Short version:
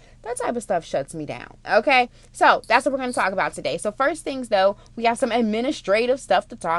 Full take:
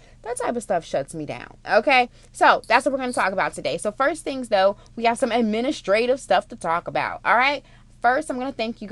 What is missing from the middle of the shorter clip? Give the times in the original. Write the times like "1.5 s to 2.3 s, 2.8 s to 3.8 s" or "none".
none

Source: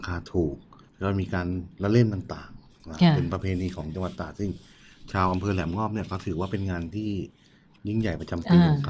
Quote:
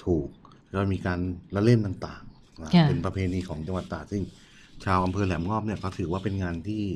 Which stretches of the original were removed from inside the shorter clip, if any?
none

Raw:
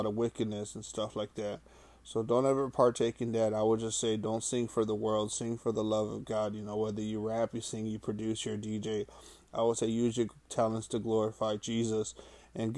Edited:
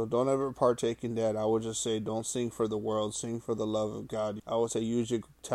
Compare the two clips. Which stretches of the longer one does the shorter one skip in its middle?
6.6 s to 9.5 s

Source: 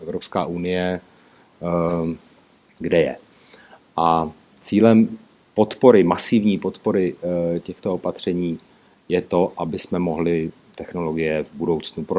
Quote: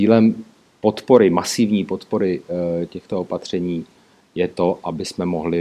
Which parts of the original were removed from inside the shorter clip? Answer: none

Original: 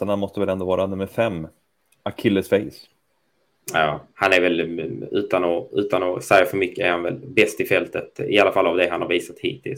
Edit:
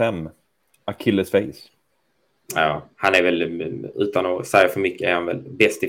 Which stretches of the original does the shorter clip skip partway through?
5.1 s to 5.7 s

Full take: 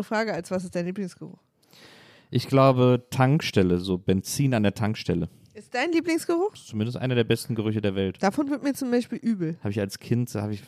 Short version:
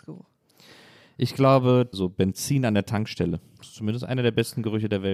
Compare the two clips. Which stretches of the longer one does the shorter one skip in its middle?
3.1 s to 3.8 s, 5.5 s to 6.5 s

